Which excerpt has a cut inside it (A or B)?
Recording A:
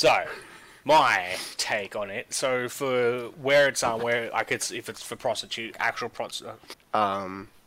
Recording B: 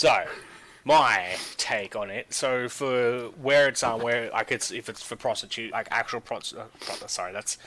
A